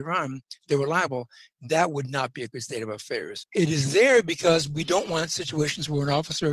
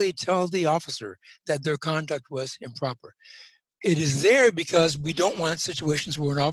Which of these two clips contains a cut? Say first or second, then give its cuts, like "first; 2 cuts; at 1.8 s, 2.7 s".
first; 1 cut; at 3.4 s